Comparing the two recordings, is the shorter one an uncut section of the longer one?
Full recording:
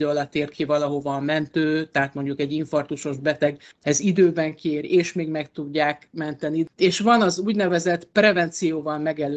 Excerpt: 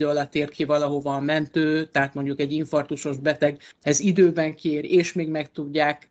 yes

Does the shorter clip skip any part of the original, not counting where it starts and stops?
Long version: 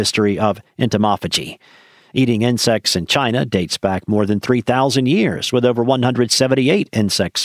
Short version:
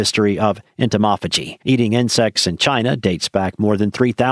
yes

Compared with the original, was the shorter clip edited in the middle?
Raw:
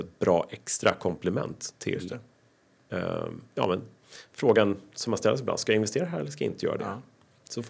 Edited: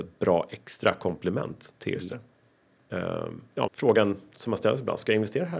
yes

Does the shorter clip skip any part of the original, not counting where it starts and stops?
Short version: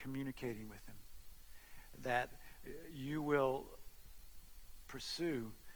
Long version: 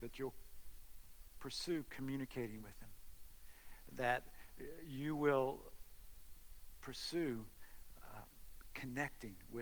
no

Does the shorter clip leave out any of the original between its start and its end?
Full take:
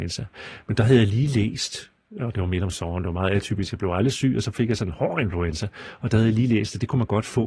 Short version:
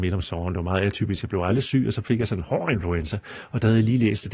no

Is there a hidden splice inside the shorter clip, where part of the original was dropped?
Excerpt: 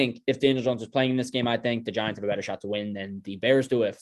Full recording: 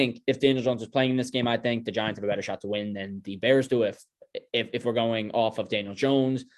no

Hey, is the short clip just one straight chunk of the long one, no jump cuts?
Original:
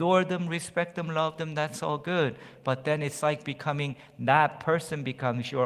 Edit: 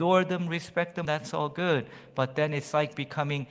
no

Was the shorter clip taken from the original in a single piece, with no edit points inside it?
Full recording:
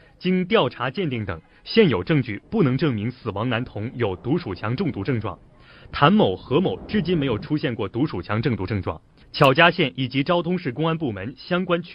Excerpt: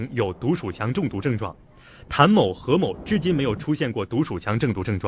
yes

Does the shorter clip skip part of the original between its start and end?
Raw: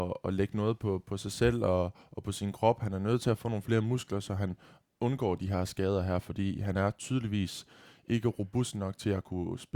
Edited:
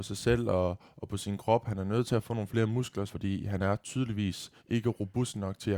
yes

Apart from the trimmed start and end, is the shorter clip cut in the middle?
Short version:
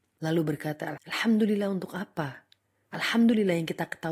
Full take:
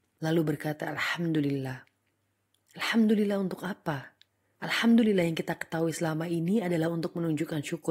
yes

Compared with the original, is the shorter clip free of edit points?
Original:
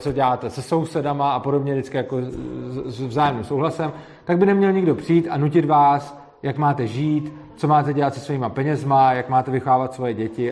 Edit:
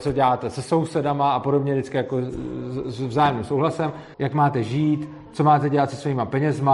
no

